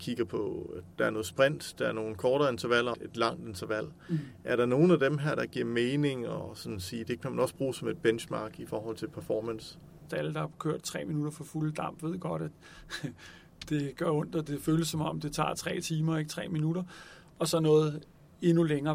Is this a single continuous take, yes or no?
no